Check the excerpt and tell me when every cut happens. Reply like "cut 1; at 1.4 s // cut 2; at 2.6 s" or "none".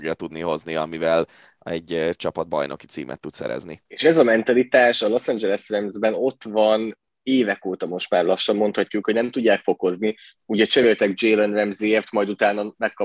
cut 1; at 3.9 s // cut 2; at 9.0 s